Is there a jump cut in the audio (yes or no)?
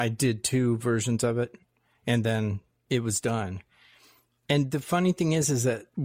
no